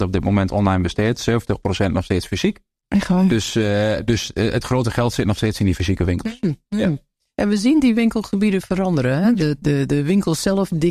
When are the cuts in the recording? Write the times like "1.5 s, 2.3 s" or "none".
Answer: 9.6 s